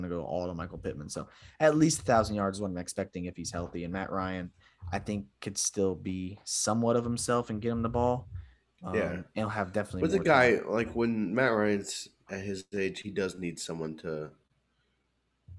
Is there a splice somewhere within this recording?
no; 0 cuts

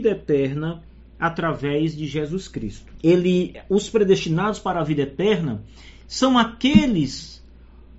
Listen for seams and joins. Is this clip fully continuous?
no; 1 cut; at 3.0 s

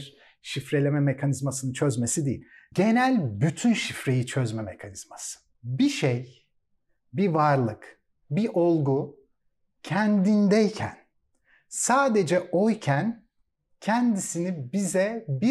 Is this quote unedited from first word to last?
no; 2 cuts; at 2.7 s, 5.5 s

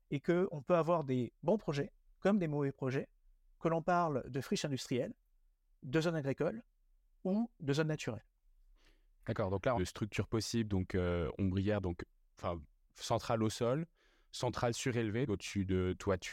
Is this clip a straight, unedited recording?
no; 2 cuts; at 9.7 s, 15.3 s

